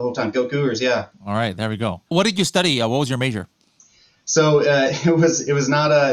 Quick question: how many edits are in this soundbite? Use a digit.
1